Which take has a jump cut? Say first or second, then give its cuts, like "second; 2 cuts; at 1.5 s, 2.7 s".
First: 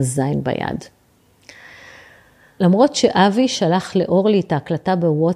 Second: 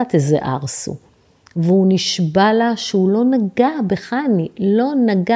first; 1 cut; at 2.6 s